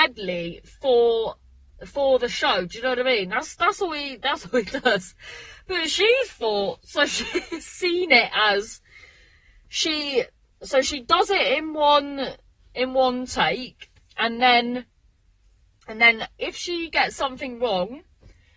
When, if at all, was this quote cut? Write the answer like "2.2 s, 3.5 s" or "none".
none